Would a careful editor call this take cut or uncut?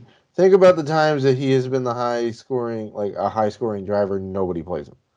uncut